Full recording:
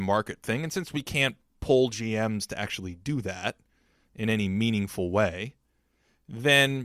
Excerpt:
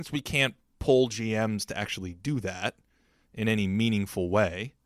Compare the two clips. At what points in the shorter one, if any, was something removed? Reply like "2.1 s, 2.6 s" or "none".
none

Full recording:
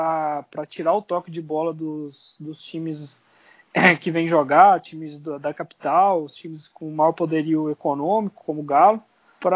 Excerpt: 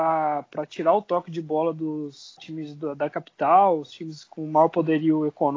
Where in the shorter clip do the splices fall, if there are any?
2.4 s

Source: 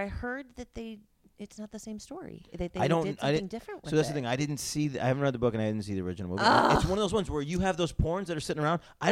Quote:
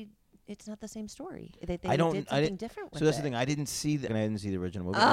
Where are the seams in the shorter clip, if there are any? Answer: 4.1 s

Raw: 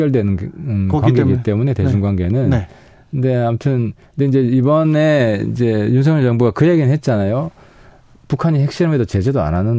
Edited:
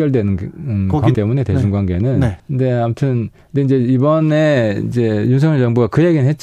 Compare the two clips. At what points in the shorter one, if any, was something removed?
1.1 s, 2.4 s

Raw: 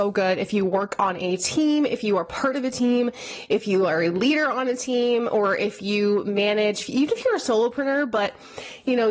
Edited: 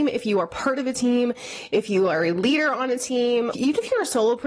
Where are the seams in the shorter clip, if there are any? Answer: 3.5 s

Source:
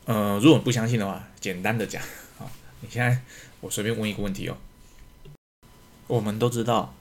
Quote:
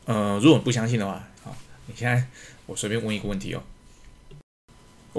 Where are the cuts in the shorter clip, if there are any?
1.4 s

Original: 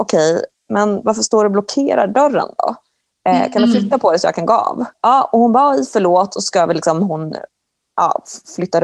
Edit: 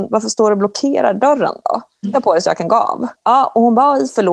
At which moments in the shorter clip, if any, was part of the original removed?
2.0 s

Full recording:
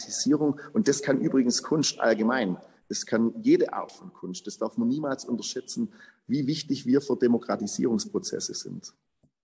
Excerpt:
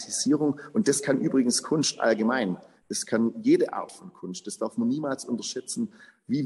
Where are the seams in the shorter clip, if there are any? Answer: none

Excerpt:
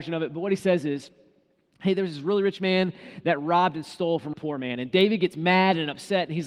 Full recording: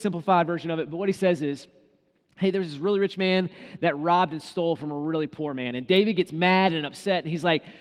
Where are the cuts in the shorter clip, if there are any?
4.3 s

